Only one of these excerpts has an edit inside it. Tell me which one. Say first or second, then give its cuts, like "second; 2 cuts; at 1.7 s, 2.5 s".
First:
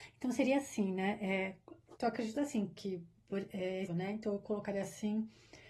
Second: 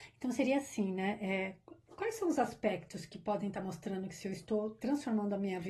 first; 2 cuts; at 2.0 s, 3.9 s